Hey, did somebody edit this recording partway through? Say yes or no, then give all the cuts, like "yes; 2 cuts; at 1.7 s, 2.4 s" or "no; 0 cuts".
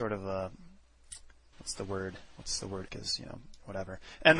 yes; 1 cut; at 2.9 s